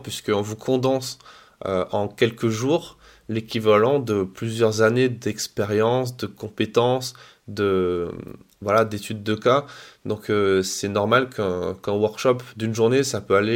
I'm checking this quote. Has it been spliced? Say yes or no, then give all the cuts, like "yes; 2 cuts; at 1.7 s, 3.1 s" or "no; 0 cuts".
no; 0 cuts